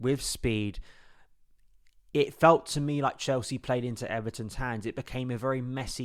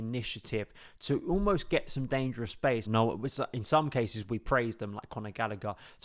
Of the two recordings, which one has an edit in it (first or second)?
second